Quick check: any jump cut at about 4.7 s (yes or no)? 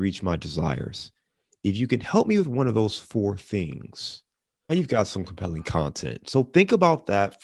yes